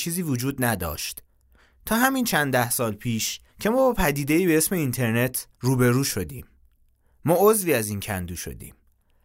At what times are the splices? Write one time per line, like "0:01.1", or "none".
0:03.5
0:05.5